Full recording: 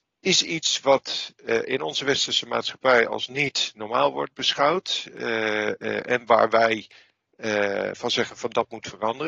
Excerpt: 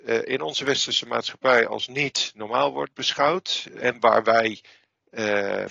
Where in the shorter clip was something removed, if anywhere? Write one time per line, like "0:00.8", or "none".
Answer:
0:03.8